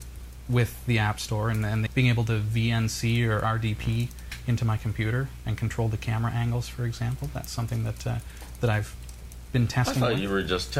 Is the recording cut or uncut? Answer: cut